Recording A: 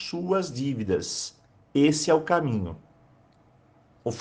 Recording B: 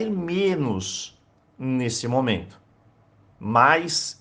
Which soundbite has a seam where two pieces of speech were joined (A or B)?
B